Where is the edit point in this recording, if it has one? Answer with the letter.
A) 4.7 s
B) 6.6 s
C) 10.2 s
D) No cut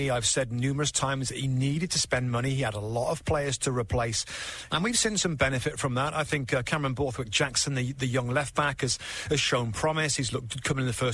A